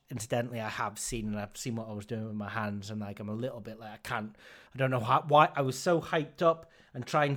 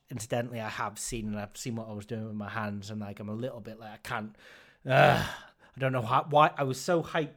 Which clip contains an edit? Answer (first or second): first